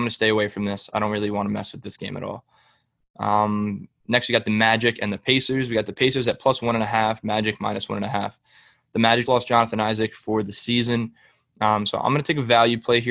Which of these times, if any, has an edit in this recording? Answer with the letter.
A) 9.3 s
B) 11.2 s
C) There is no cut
A